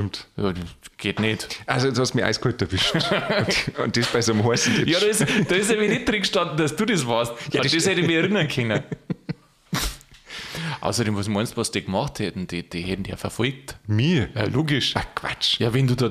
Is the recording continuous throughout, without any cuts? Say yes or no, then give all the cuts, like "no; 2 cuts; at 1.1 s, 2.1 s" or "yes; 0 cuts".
yes; 0 cuts